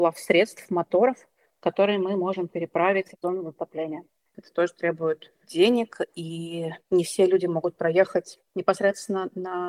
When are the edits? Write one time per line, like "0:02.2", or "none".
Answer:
0:04.3